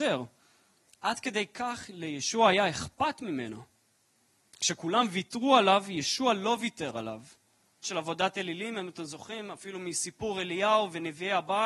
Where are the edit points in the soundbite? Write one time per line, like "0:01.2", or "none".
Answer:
0:07.8